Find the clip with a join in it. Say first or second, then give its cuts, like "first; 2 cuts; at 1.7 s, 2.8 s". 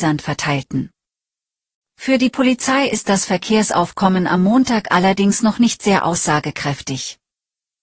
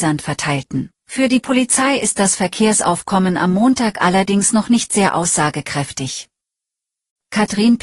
second; 1 cut; at 1.0 s